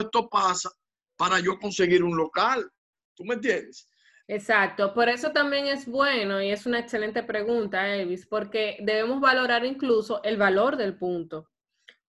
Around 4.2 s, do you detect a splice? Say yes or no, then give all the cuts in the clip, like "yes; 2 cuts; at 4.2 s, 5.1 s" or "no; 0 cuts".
yes; 1 cut; at 4.2 s